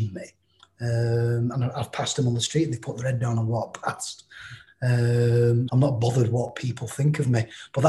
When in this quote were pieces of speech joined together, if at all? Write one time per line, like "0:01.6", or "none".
0:04.7
0:05.7